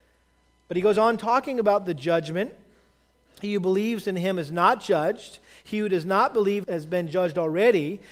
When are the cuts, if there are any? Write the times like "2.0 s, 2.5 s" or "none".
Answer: 6.6 s